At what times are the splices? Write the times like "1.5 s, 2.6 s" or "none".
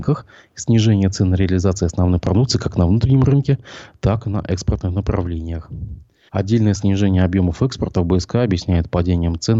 6.3 s